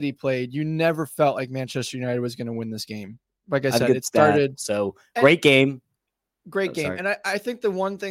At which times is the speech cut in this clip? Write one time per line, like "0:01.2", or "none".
0:04.5